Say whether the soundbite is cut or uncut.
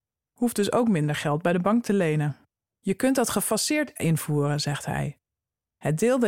cut